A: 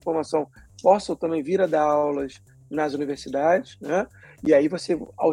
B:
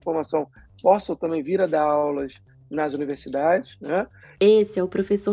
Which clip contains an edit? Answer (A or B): B